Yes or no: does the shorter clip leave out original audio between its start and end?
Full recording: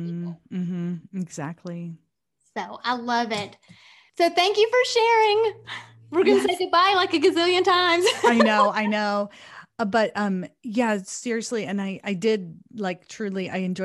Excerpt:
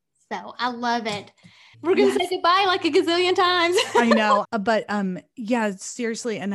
yes